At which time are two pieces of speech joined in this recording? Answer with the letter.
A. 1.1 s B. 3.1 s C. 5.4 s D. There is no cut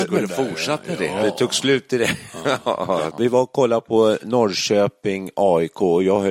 B